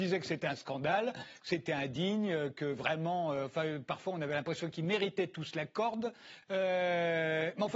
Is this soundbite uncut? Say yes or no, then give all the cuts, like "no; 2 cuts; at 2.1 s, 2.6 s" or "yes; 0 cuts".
yes; 0 cuts